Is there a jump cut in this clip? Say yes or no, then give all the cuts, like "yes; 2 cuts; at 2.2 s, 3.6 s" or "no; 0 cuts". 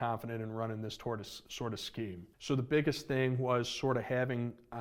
yes; 1 cut; at 2.3 s